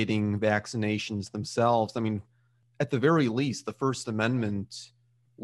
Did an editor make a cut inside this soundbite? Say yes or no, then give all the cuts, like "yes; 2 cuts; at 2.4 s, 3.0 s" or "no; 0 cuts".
no; 0 cuts